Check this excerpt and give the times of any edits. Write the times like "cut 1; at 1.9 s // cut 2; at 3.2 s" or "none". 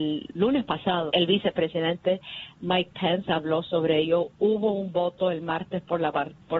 cut 1; at 1.1 s